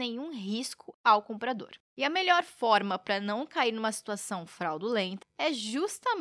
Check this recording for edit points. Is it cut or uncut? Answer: cut